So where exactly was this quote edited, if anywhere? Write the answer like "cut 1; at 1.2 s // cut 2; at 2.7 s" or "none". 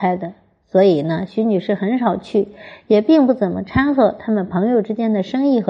none